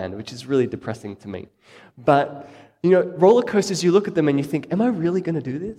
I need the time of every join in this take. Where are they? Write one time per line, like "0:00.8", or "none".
none